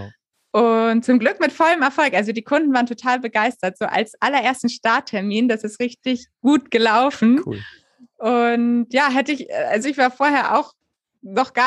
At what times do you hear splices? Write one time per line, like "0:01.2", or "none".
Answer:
none